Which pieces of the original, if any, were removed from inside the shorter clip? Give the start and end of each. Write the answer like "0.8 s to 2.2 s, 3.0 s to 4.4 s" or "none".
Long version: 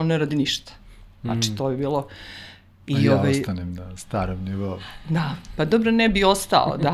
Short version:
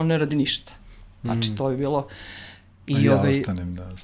none